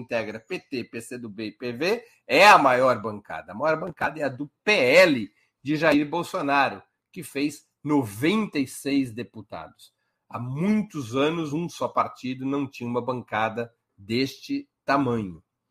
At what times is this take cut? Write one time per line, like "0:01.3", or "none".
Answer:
none